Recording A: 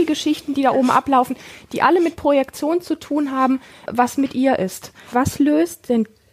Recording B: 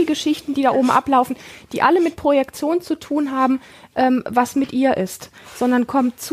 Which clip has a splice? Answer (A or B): A